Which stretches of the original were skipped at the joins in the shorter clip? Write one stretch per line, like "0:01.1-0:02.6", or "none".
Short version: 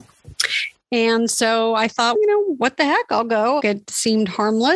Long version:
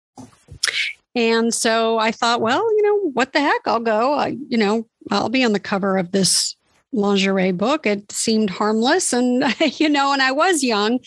0:02.4-0:02.7
0:04.1-0:07.8